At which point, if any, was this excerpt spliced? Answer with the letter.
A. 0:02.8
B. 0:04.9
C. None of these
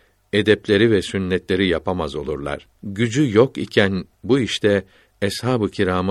A